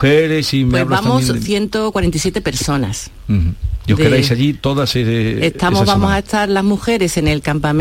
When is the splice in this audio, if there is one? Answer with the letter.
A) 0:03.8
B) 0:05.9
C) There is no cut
C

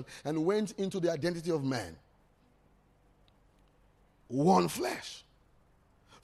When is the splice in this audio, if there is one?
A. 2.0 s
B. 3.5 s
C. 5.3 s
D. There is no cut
D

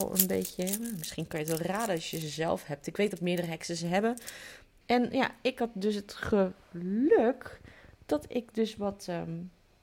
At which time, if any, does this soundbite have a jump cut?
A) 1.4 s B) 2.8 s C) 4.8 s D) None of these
C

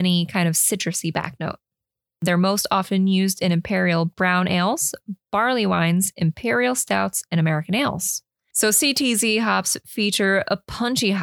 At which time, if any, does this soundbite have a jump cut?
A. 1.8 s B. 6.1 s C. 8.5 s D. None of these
C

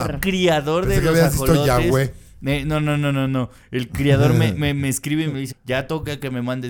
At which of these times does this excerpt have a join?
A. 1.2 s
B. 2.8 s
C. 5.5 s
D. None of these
C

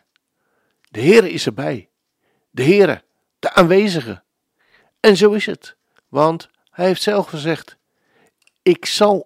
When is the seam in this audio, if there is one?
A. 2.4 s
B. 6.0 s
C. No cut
B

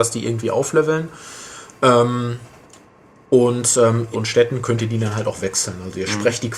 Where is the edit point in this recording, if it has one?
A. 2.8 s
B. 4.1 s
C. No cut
B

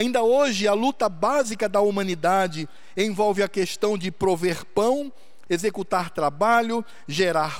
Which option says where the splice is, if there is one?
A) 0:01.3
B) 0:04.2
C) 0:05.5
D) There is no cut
C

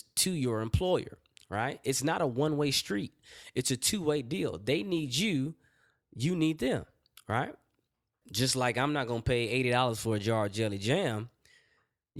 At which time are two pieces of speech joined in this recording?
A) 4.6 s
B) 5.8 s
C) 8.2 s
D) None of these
C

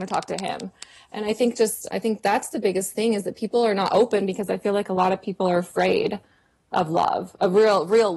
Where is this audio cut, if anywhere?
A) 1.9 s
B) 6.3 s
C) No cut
A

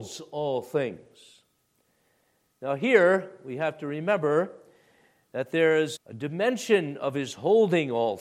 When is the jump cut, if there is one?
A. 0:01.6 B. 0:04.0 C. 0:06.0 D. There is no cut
C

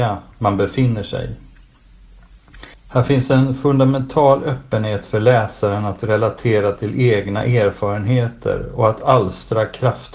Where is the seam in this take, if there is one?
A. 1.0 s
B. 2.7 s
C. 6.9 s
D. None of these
B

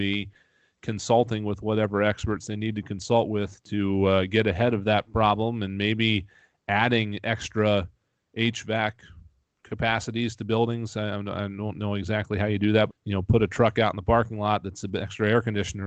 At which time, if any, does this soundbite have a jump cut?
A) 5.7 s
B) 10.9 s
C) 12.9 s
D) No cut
C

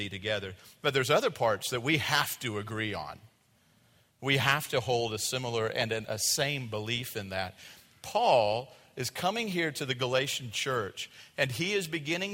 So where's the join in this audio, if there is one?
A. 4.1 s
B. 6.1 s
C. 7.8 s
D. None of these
B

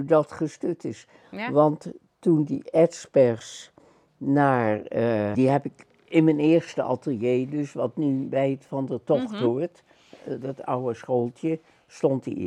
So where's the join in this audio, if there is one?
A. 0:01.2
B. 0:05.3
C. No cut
B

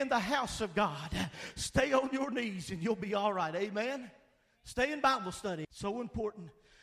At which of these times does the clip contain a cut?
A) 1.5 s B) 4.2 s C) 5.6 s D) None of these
C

